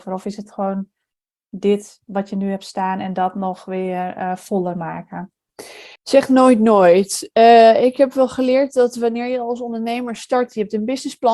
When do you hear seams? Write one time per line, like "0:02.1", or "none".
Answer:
0:06.0